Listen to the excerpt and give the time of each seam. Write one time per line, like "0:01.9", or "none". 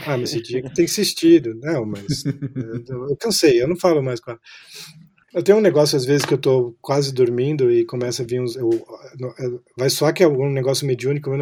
0:05.2